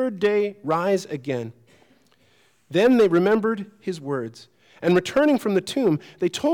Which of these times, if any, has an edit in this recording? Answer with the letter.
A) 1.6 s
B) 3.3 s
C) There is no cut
C